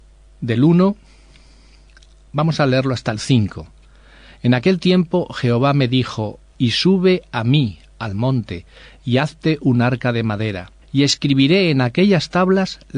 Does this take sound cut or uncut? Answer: cut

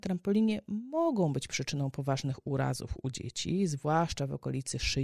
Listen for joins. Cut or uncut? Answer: uncut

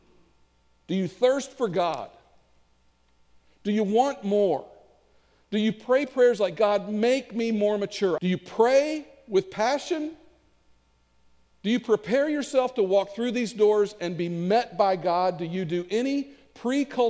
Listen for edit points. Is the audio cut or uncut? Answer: cut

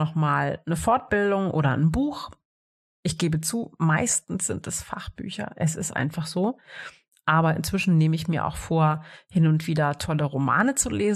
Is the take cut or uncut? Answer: uncut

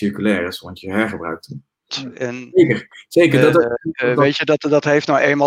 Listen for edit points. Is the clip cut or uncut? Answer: cut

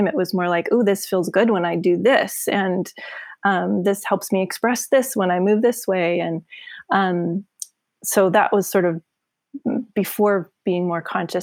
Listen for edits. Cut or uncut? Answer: uncut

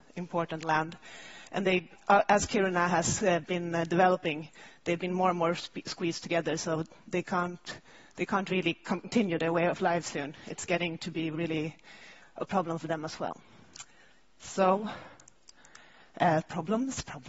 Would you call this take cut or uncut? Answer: uncut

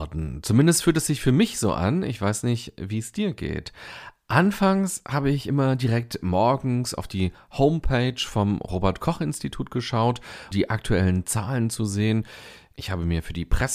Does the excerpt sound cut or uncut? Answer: cut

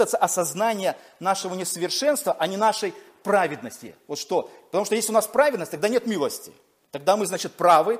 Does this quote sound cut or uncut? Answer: uncut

